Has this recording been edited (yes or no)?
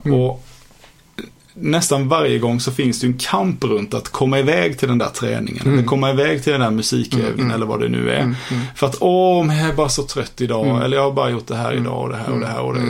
yes